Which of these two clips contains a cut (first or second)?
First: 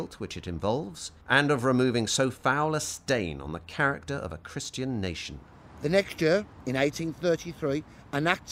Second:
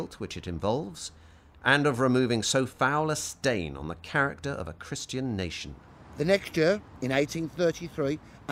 first